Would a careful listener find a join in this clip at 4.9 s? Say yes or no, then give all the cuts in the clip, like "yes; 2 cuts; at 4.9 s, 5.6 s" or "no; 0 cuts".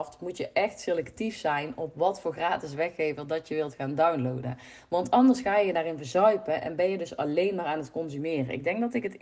no; 0 cuts